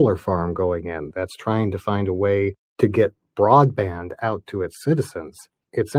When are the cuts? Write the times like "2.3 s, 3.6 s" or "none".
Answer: 1.1 s